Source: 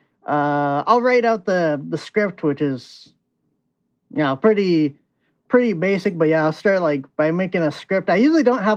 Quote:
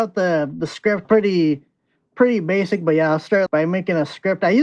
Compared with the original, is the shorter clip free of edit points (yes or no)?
no